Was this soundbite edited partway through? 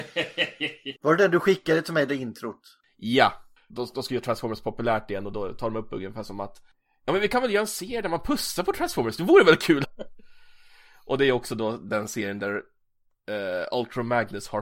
yes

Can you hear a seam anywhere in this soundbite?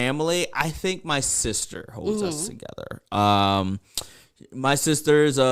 no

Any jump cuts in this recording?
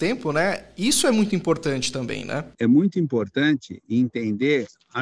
yes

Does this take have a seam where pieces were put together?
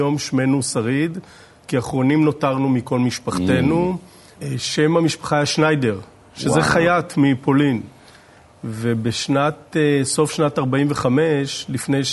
yes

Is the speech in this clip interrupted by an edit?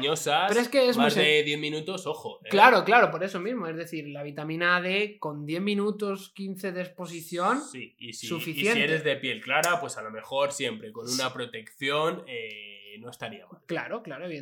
no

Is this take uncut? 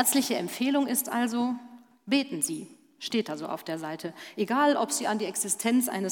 yes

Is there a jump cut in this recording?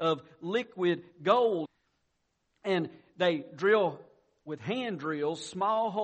yes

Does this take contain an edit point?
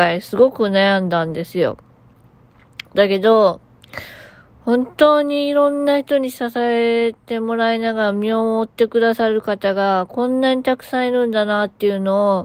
no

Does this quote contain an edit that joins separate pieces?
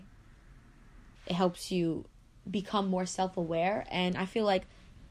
yes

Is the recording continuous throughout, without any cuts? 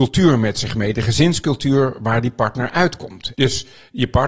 no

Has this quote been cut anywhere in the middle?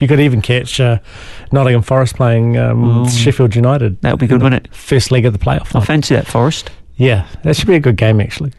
no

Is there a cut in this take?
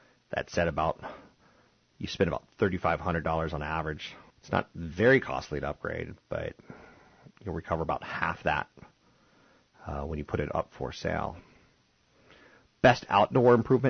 yes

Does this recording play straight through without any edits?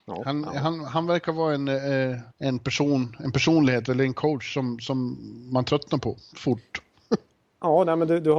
no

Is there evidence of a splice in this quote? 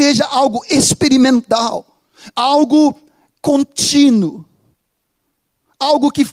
no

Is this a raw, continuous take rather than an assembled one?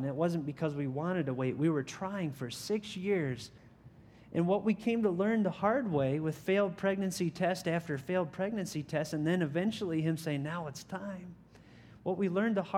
yes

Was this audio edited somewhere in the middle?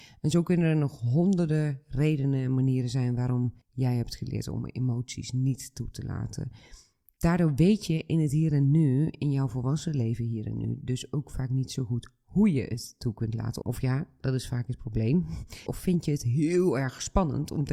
yes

